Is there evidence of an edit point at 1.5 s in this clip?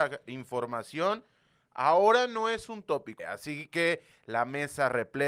no; 1 cut; at 3.2 s

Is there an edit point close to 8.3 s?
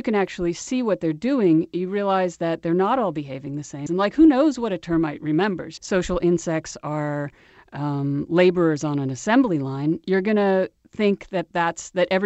no; 2 cuts; at 3.9 s, 5.8 s

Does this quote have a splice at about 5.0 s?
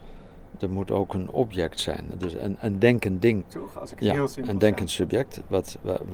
no; 2 cuts; at 2.1 s, 3.4 s

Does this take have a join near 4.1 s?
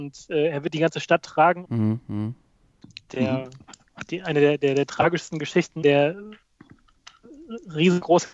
no; 2 cuts; at 1.6 s, 5.8 s

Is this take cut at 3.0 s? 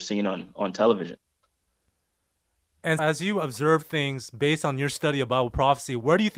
yes; 1 cut; at 3.0 s

